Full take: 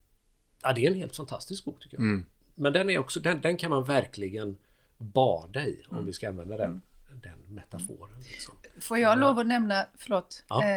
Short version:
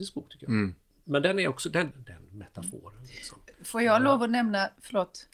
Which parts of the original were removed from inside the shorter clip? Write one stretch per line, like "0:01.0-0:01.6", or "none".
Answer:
0:03.4-0:07.1